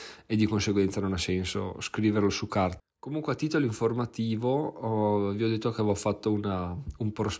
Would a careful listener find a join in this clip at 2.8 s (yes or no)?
yes